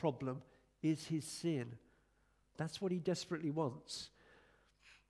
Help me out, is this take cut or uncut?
cut